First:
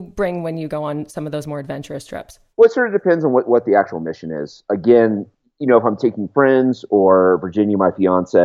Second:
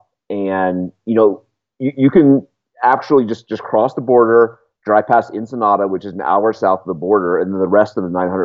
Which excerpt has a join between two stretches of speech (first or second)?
first